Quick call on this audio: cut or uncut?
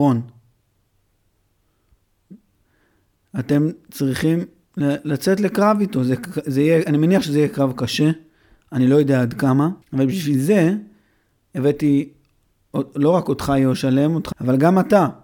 cut